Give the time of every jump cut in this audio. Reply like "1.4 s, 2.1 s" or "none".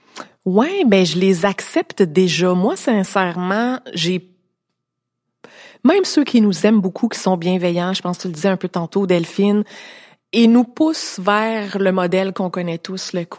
none